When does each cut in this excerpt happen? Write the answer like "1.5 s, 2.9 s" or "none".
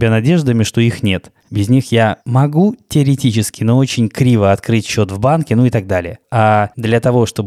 1.4 s, 6.2 s